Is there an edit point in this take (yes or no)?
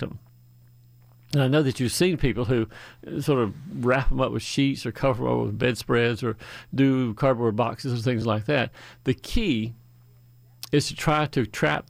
no